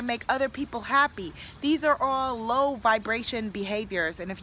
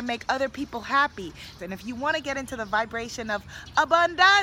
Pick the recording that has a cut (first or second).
second